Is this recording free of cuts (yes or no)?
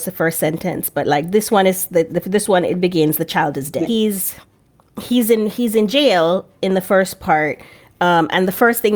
no